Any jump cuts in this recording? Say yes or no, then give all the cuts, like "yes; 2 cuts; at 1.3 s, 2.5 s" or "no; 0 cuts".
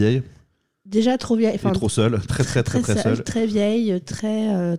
yes; 1 cut; at 2.3 s